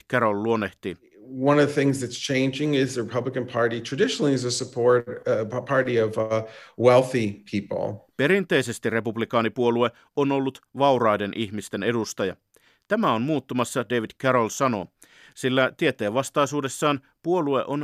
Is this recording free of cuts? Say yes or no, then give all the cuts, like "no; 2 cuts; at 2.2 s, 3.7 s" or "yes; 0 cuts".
yes; 0 cuts